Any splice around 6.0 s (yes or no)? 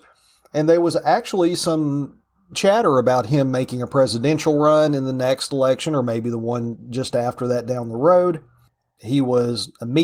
no